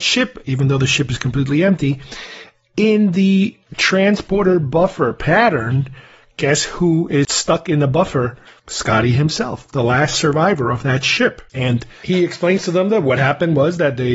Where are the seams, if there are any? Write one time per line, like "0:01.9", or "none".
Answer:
none